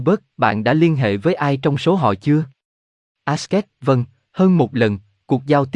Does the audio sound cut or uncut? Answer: uncut